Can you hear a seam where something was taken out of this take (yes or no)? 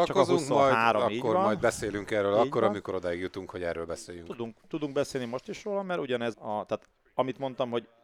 yes